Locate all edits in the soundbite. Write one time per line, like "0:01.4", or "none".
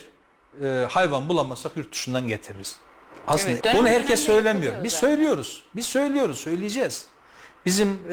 0:03.6